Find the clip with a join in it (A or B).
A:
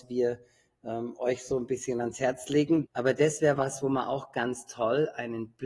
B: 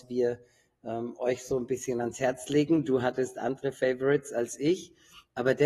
A